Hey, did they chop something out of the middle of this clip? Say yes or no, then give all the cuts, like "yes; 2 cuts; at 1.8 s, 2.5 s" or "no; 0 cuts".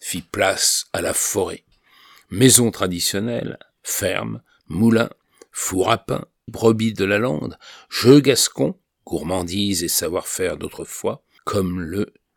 yes; 1 cut; at 6.5 s